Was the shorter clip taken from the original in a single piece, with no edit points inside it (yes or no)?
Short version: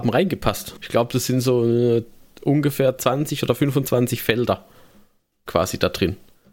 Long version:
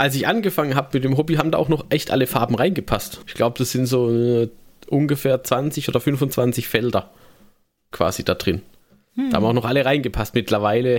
yes